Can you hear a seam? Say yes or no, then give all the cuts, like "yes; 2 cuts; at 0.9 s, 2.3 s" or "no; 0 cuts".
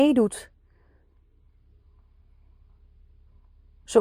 no; 0 cuts